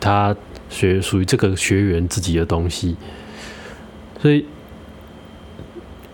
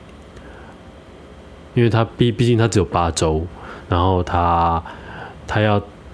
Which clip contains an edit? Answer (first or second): second